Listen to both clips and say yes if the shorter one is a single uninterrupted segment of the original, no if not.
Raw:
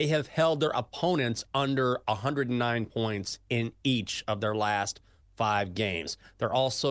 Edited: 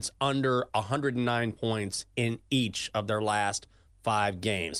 yes